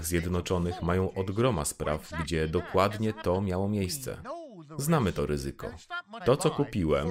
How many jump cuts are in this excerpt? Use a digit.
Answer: 1